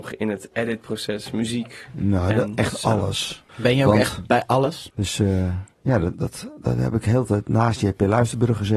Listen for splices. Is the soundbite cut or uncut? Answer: cut